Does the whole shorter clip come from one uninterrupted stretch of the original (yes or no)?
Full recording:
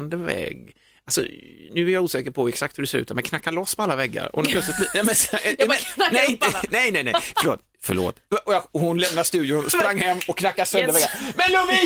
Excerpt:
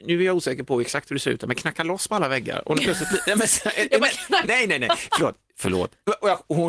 no